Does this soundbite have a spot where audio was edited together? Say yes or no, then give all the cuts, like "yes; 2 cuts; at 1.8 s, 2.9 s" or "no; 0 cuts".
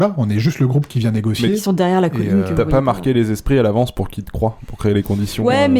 no; 0 cuts